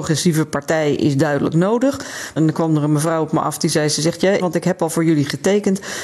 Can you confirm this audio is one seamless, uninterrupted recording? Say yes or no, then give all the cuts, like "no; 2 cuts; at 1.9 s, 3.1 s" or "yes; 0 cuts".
no; 2 cuts; at 2.4 s, 4.4 s